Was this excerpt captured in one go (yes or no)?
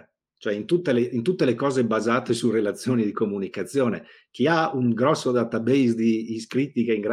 yes